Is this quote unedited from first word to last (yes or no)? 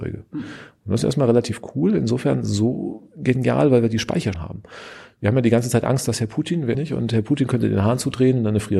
no